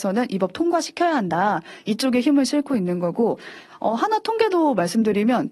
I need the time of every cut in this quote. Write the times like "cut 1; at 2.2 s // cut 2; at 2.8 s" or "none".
none